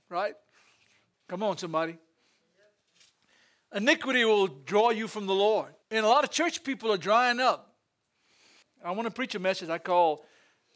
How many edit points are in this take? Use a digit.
3